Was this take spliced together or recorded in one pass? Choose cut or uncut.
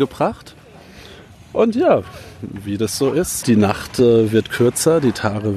cut